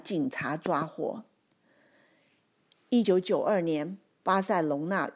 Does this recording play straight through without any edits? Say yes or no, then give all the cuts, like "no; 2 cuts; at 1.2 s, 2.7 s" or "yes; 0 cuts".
yes; 0 cuts